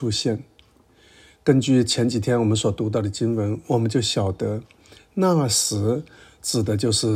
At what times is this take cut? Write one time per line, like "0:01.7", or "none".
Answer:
none